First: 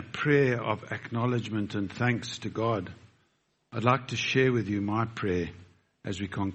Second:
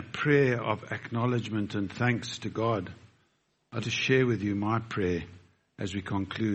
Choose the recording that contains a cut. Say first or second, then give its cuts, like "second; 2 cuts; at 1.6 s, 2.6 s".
second; 1 cut; at 3.8 s